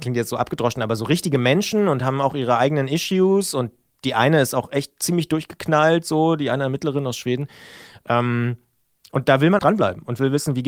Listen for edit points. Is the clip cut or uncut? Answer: cut